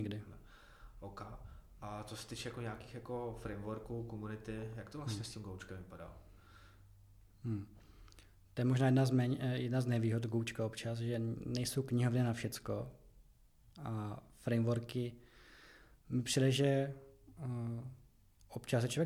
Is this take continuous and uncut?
yes; 0 cuts

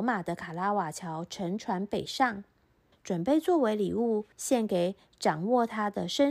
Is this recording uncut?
no; 2 cuts; at 2.9 s, 4.3 s

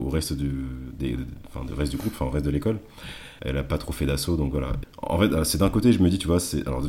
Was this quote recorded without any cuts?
no; 2 cuts; at 3.4 s, 4.8 s

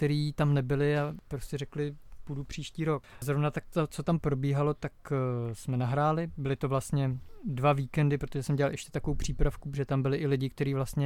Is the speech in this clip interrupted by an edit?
no; 0 cuts

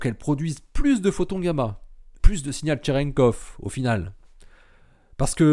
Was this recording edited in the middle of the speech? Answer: yes; 1 cut; at 2.2 s

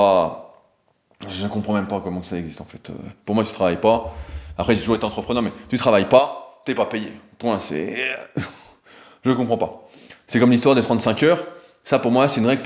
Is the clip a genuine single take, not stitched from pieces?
yes; 0 cuts

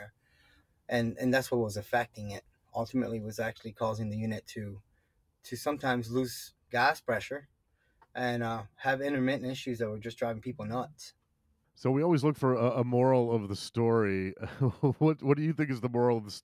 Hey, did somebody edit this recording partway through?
no; 0 cuts

